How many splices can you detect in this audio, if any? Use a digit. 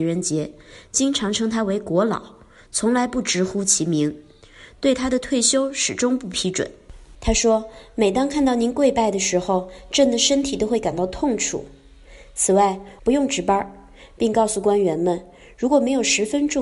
2